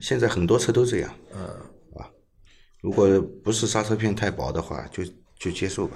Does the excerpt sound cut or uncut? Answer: uncut